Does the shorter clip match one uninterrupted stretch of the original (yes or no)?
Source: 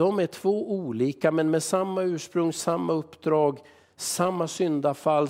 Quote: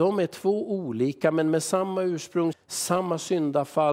no